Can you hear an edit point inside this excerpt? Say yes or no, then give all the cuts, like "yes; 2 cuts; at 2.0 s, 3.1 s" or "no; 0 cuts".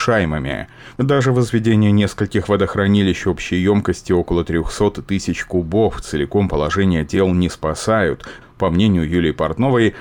yes; 2 cuts; at 0.9 s, 8.4 s